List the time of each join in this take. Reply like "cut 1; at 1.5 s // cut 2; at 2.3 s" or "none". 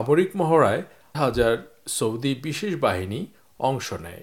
cut 1; at 1.1 s